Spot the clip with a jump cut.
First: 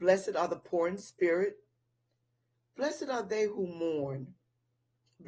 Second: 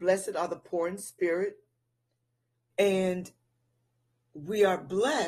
second; 1 cut; at 2.7 s

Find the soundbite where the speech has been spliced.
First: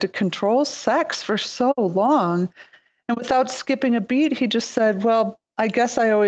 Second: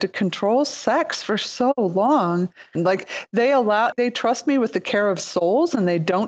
second; 2 cuts; at 2.8 s, 3.9 s

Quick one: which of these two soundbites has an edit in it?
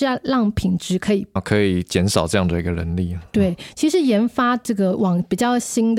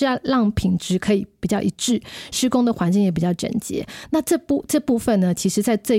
first; 1 cut; at 1.4 s

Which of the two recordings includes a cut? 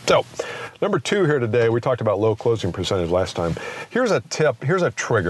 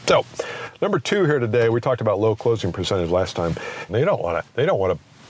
second; 1 cut; at 3.9 s

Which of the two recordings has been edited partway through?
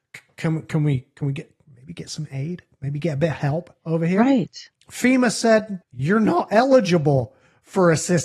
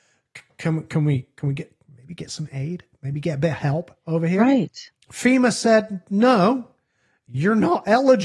first; 1 cut; at 5.8 s

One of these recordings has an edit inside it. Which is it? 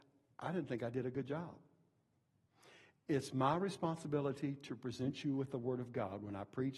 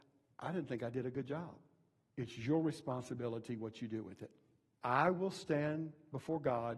second; 2 cuts; at 2.1 s, 4.7 s

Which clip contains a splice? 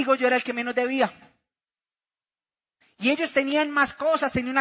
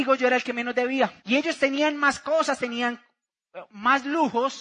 second; 2 cuts; at 1.2 s, 2.6 s

